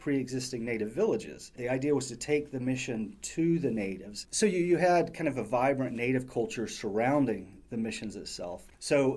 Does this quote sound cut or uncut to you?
cut